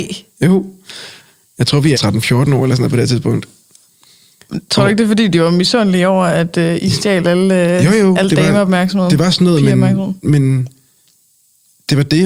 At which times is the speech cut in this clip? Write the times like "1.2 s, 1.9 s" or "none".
1.9 s